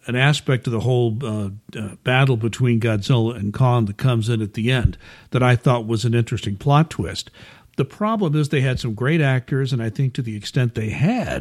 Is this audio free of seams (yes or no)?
yes